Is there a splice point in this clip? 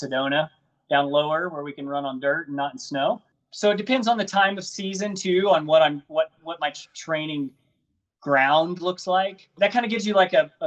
yes; 1 cut; at 9.6 s

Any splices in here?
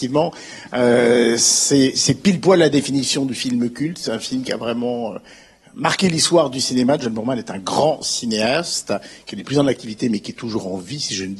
no; 0 cuts

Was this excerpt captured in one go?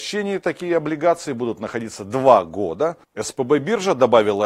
no; 1 cut; at 3.0 s

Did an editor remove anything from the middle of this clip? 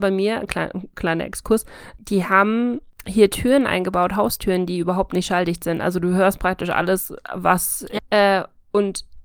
yes; 1 cut; at 8.0 s

